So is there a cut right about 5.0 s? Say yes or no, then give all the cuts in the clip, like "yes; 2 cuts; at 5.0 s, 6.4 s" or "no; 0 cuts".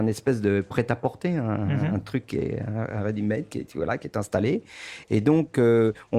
yes; 1 cut; at 5.0 s